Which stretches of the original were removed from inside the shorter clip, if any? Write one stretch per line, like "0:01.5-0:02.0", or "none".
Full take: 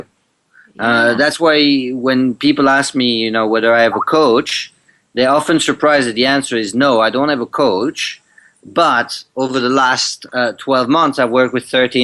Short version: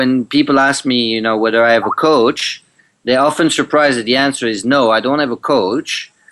none